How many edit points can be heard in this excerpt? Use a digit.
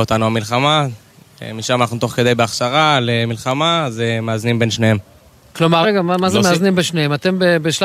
1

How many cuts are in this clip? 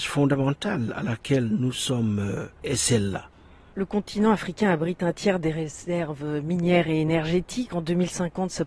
1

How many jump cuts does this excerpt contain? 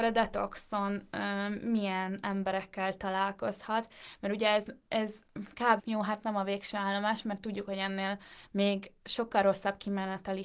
1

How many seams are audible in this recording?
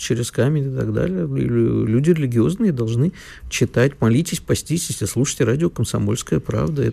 0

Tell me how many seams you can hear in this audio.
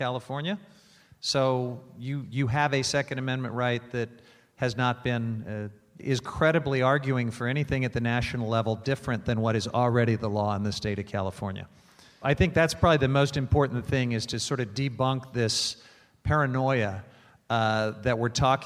2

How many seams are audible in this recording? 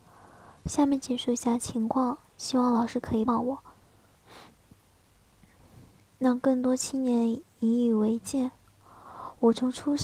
1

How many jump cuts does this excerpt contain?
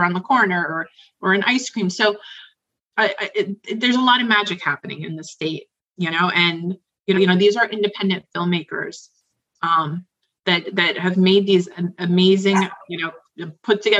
1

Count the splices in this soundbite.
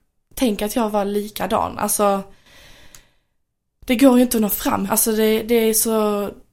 1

